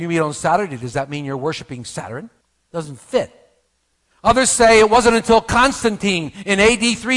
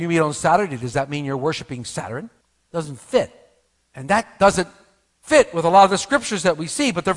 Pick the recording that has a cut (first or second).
second